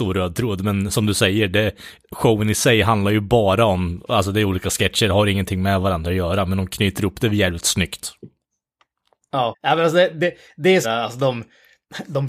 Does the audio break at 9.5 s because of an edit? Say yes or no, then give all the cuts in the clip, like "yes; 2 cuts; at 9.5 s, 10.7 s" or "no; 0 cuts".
yes; 2 cuts; at 9.5 s, 10.8 s